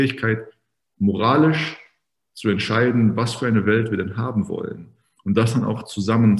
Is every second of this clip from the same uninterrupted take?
yes; 0 cuts

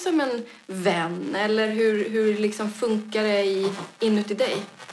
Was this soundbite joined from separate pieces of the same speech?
no; 0 cuts

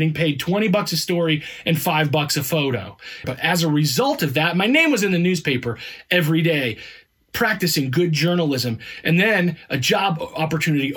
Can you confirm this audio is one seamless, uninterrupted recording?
no; 1 cut; at 3.2 s

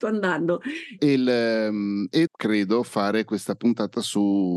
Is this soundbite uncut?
no; 2 cuts; at 1.0 s, 2.3 s

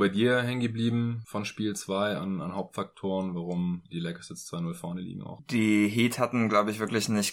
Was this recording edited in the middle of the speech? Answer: no; 0 cuts

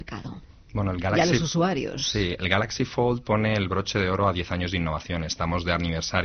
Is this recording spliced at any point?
no; 0 cuts

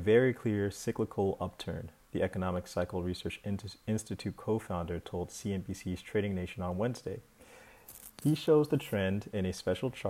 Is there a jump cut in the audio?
no; 0 cuts

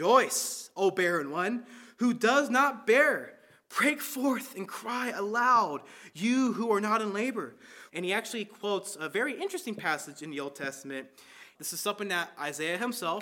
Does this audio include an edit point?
yes; 2 cuts; at 7.9 s, 11.5 s

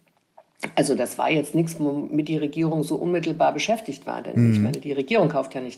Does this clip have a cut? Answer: no; 0 cuts

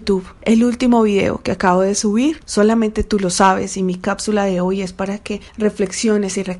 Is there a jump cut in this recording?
yes; 1 cut; at 2.4 s

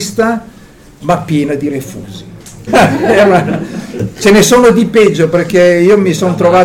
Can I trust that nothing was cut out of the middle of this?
no; 1 cut; at 2.7 s

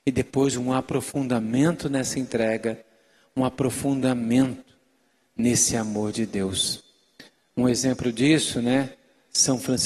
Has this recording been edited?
no; 0 cuts

